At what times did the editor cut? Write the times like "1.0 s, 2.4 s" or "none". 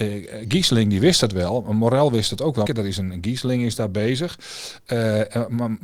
2.7 s

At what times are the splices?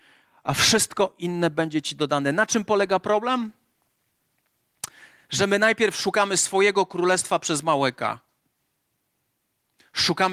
none

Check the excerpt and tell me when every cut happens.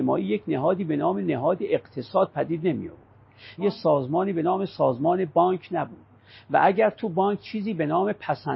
3.6 s

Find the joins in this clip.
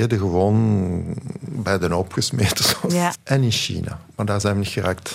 3.1 s

